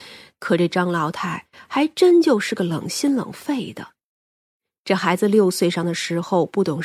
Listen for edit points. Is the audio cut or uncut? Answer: uncut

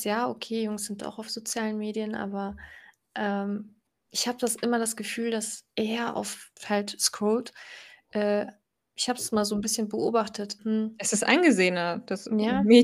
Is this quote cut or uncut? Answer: cut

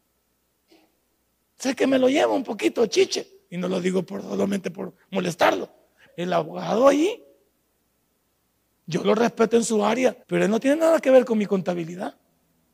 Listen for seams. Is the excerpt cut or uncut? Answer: cut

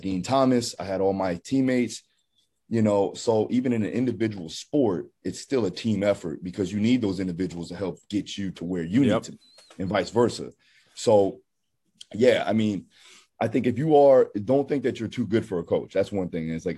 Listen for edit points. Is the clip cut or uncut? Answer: uncut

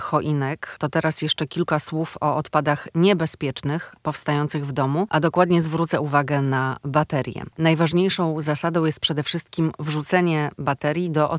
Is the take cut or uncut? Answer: uncut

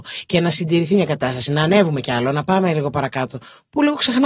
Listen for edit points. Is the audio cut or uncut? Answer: uncut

